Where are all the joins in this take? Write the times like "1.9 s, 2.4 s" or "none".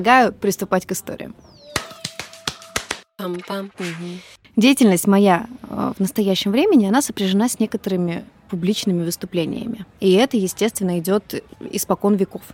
none